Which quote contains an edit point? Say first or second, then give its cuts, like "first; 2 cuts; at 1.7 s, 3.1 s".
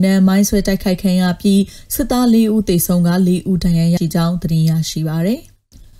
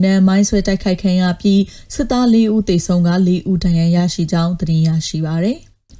first; 1 cut; at 4.0 s